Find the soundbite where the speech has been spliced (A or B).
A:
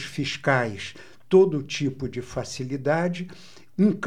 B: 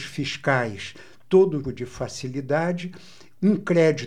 B